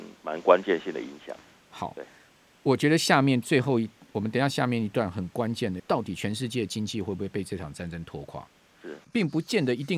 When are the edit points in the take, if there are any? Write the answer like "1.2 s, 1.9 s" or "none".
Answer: 5.8 s, 9.0 s